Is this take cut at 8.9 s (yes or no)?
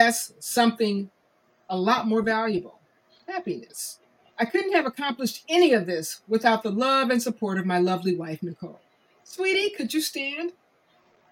no